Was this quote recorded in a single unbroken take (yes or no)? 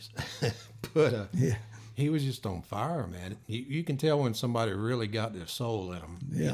yes